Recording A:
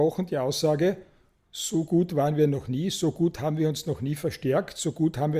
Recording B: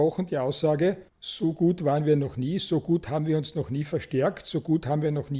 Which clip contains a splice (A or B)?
B